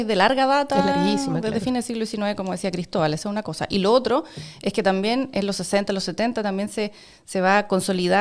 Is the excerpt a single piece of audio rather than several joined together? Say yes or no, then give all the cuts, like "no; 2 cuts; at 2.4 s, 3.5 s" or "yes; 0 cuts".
yes; 0 cuts